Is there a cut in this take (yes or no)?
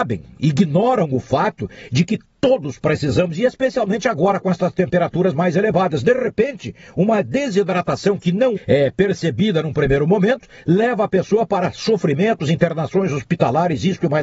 yes